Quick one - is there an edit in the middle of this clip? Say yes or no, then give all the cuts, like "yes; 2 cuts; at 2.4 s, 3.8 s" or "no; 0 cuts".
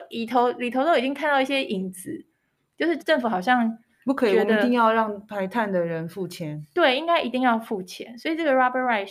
yes; 1 cut; at 3.0 s